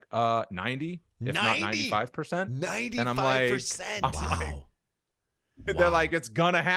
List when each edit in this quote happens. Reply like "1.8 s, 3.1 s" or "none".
none